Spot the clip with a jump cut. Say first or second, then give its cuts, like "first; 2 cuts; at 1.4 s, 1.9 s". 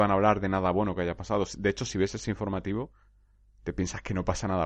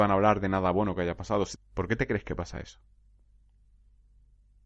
second; 1 cut; at 1.6 s